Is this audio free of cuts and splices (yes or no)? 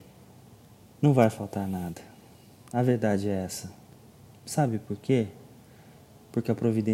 yes